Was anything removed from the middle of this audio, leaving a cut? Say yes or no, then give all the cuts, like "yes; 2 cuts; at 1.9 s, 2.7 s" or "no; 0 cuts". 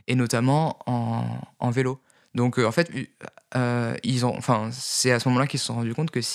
no; 0 cuts